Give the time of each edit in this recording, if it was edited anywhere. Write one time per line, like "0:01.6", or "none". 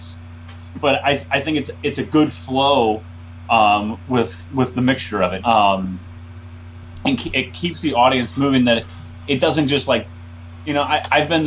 0:05.4
0:07.3